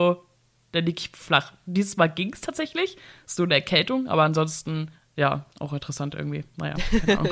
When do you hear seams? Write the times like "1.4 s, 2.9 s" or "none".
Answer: 5.5 s